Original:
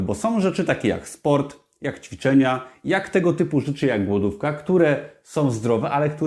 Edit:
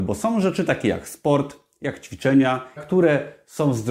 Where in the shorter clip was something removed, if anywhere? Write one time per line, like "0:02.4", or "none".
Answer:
0:02.8

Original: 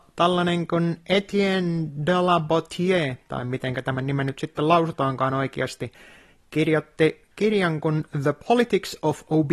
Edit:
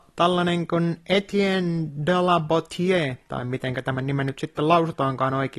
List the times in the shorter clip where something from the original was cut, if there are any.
none

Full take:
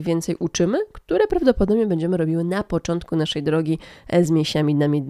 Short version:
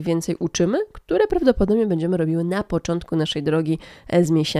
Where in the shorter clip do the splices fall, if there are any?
none

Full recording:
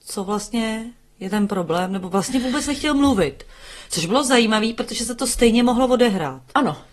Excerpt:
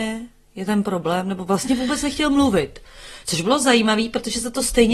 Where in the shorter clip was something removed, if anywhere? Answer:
none

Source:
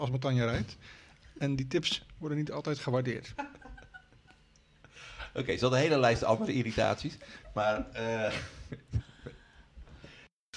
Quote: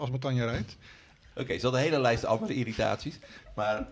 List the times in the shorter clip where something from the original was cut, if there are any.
0:01.3

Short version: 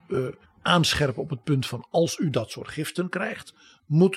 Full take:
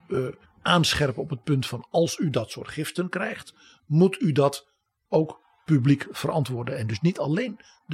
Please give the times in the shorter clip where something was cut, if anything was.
none

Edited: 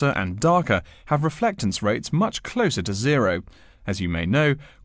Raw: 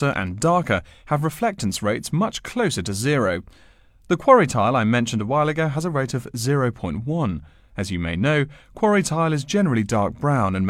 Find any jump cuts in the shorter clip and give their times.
0:03.7

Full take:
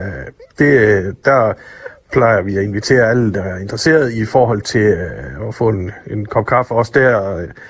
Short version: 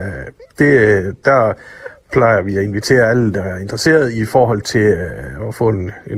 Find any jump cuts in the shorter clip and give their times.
none

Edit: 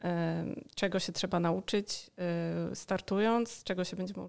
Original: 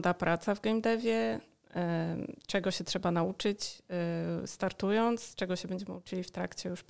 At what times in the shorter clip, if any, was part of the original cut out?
none

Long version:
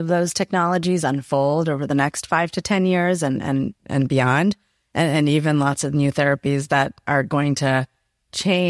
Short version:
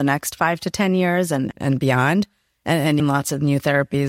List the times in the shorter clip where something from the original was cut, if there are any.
0:01.5
0:03.0

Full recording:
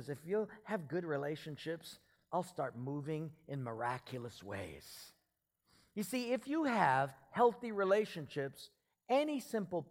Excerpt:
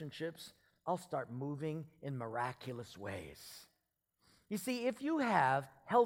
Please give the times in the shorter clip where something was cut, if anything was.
none

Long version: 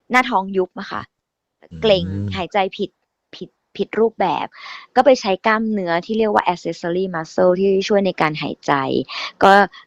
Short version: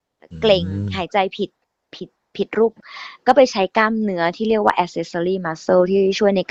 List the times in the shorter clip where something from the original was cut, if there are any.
0:02.8

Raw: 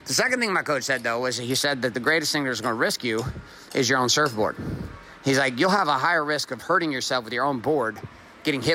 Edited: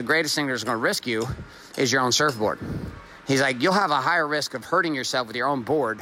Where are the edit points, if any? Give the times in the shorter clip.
none

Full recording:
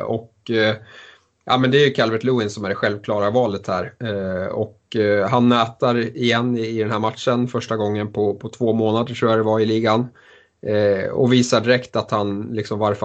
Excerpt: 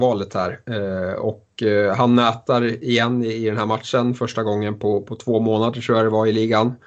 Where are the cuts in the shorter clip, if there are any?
none

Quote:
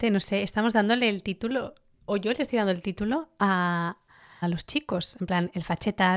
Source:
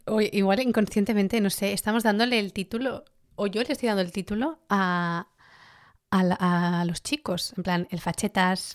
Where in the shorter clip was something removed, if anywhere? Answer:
0:04.4

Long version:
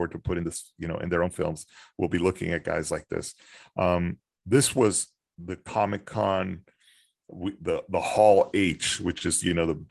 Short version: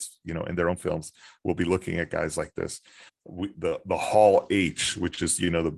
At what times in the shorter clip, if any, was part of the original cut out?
0:03.1

